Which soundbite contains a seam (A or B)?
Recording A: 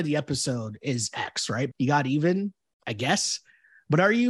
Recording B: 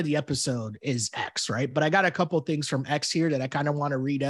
A